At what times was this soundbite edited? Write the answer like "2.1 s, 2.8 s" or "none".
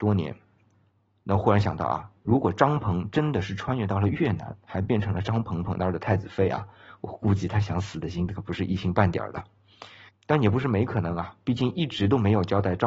none